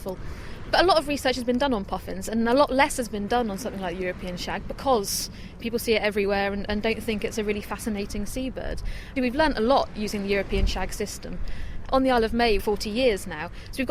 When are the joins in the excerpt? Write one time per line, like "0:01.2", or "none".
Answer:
0:09.2
0:12.6